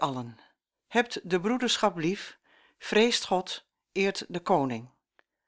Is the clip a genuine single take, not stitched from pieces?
yes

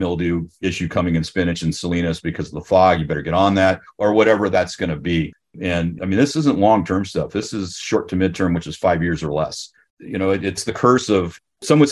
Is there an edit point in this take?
no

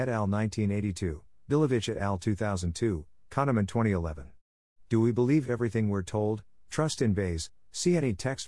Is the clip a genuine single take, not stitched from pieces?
no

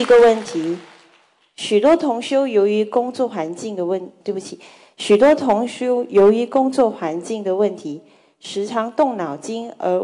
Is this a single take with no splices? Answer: no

